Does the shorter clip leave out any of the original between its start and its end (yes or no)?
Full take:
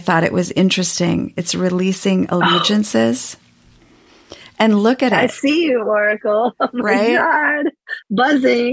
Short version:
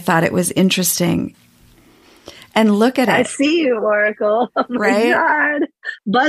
yes